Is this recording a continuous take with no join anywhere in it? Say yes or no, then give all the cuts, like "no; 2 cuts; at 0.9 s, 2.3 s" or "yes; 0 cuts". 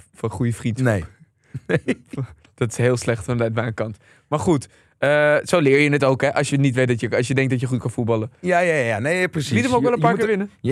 yes; 0 cuts